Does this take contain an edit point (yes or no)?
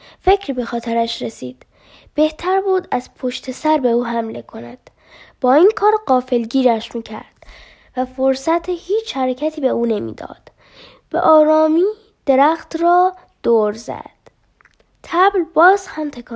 no